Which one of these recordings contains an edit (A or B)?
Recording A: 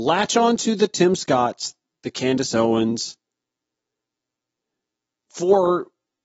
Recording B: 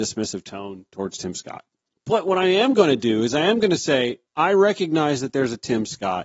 B